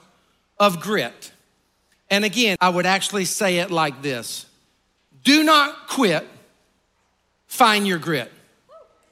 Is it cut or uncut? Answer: cut